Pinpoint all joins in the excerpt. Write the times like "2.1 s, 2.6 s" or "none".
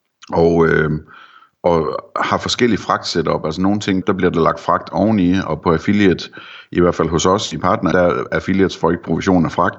4.0 s, 7.9 s